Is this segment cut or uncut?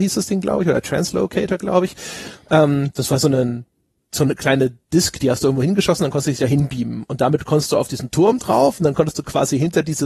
uncut